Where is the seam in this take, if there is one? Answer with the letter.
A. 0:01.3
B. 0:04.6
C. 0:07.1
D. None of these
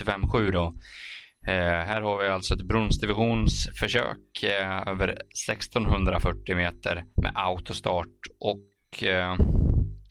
C